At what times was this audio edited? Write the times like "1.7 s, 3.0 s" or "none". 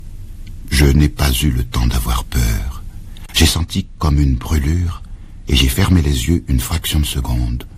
none